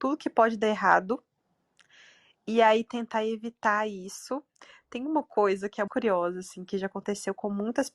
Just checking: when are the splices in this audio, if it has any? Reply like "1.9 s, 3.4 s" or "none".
5.9 s